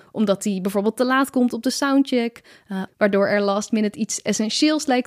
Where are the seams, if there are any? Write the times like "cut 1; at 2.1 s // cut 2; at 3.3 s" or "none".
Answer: cut 1; at 2.9 s